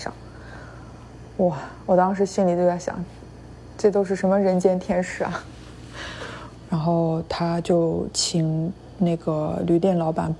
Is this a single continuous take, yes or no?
no